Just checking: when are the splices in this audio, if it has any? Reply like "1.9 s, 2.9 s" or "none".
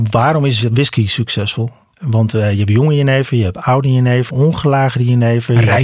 1.9 s, 4.3 s